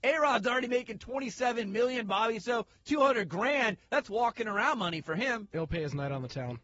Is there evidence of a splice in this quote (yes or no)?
no